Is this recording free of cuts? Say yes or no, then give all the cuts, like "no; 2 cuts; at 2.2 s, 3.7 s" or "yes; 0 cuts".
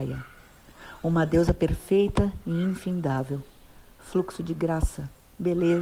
yes; 0 cuts